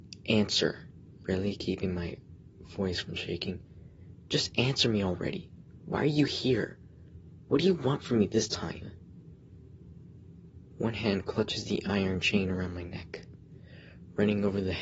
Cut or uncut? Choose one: cut